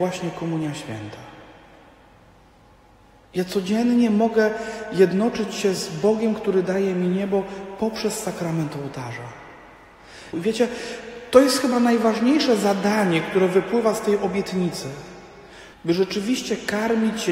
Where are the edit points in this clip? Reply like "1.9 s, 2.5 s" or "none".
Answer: 10.3 s, 15.7 s